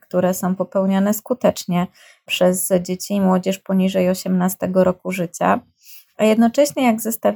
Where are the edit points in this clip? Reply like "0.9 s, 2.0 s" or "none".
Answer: none